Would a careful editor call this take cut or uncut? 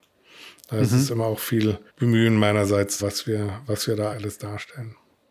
cut